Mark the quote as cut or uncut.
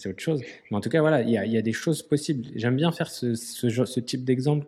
uncut